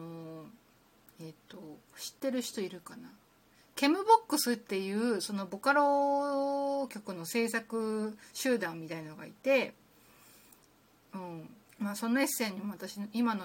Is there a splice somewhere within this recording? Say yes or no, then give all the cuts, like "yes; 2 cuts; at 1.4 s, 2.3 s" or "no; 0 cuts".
yes; 1 cut; at 11.7 s